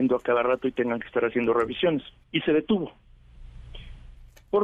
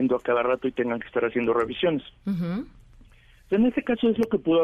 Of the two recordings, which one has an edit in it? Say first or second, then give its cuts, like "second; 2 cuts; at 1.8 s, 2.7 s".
first; 1 cut; at 2.2 s